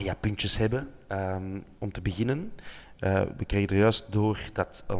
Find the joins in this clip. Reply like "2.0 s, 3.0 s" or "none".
1.8 s